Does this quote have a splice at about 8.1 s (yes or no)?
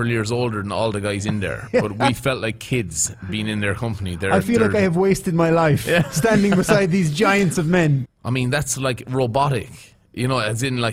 yes